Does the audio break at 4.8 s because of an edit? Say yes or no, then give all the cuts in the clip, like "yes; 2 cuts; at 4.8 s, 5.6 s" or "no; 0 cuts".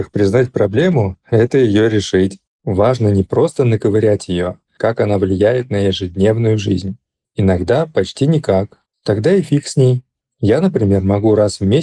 yes; 1 cut; at 4.8 s